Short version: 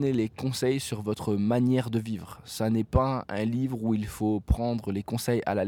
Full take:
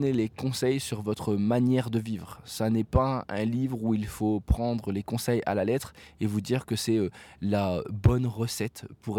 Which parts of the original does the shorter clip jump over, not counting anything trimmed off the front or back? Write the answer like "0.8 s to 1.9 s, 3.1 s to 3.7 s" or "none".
none